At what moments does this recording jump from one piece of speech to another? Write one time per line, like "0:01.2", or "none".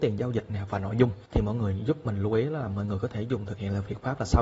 0:01.3